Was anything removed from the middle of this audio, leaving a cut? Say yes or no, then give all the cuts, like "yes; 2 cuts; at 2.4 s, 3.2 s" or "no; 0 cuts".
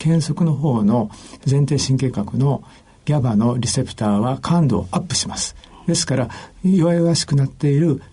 no; 0 cuts